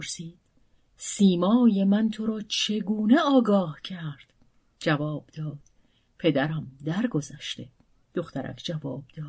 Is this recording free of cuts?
no; 2 cuts; at 4.7 s, 8.0 s

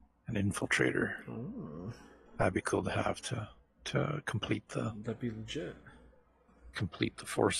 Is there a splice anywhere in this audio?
no; 0 cuts

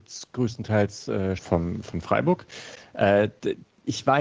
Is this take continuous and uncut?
no; 1 cut; at 1.4 s

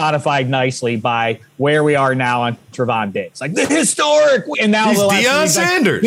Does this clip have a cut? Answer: yes; 1 cut; at 4.5 s

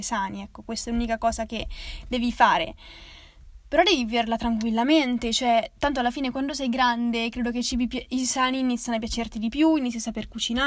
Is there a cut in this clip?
no; 0 cuts

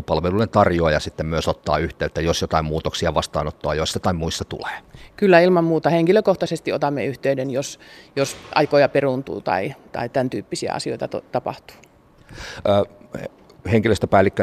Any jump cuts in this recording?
no; 0 cuts

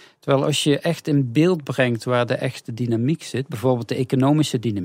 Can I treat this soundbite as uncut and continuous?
yes; 0 cuts

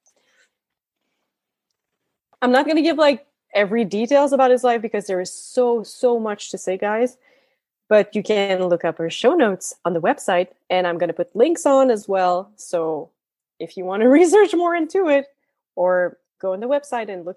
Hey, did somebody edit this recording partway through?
no; 0 cuts

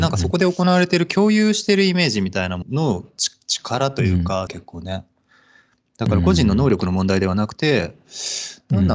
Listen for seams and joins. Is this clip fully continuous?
no; 2 cuts; at 2.6 s, 4.5 s

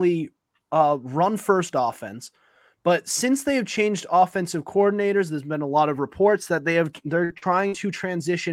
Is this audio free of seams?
yes; 0 cuts

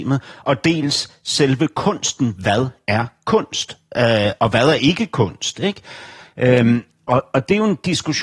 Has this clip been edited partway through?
no; 0 cuts

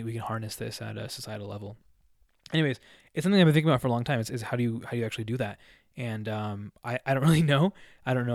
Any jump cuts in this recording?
no; 0 cuts

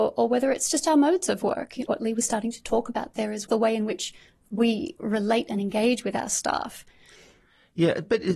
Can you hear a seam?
yes; 2 cuts; at 1.9 s, 3.5 s

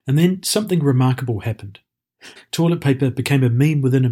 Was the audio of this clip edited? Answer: yes; 1 cut; at 2.4 s

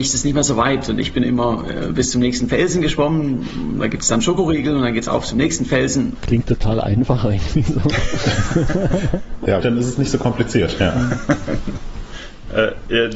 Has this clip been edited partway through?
yes; 2 cuts; at 6.2 s, 9.6 s

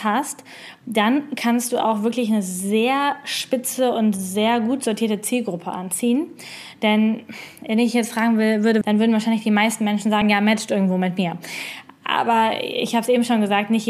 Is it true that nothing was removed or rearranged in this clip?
no; 2 cuts; at 8.8 s, 10.2 s

